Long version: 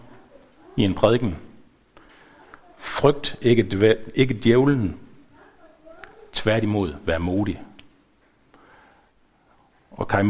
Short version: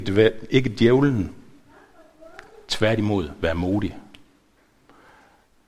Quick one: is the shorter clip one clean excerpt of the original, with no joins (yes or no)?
yes